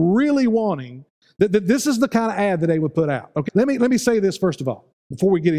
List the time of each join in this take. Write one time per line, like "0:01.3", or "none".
0:03.5